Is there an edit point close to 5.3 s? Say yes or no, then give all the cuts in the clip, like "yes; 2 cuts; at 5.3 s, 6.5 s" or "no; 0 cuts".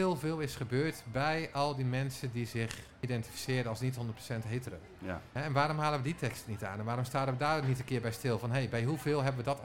no; 0 cuts